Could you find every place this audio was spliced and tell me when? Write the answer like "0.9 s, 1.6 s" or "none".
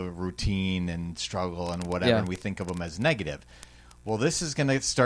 none